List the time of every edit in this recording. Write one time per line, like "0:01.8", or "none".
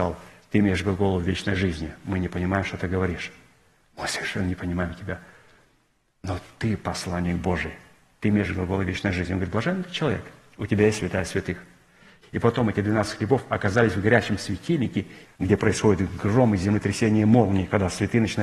0:12.2
0:15.2